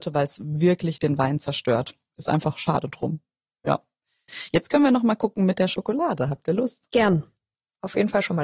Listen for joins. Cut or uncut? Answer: uncut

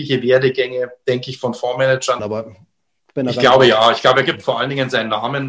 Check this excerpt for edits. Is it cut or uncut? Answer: cut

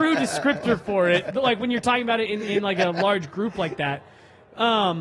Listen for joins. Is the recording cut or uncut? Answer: uncut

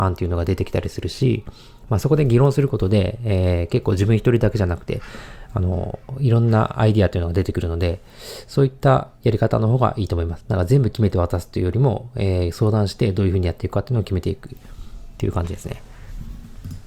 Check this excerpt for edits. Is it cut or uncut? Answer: cut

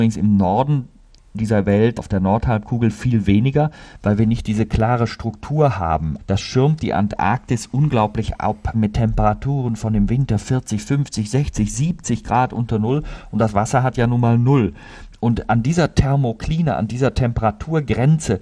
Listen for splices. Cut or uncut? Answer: cut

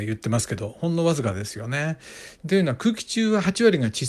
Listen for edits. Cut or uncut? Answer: cut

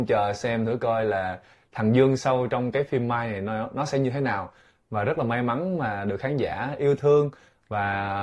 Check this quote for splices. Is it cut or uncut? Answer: uncut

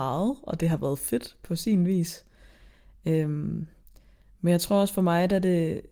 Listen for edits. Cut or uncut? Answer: uncut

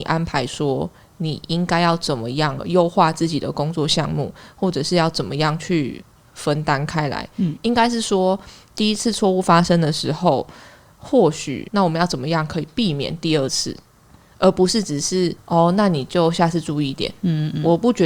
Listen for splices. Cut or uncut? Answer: uncut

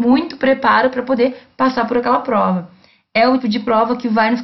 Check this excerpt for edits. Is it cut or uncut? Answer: cut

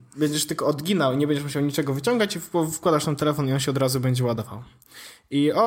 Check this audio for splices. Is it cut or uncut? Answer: uncut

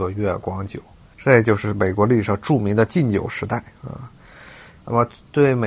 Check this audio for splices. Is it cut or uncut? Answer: cut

